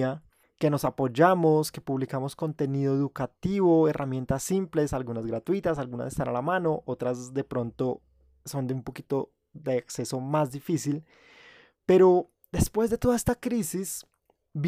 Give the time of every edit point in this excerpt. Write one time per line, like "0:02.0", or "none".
none